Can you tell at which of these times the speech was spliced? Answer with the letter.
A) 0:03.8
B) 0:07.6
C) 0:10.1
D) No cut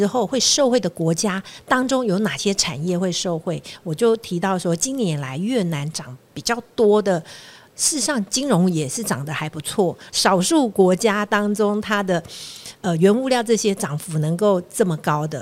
C